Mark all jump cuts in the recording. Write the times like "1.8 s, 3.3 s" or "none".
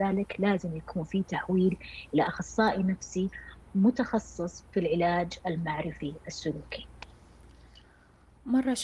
none